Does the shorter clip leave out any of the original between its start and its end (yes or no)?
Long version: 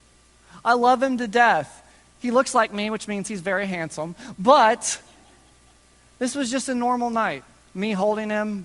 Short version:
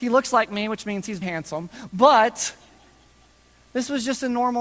yes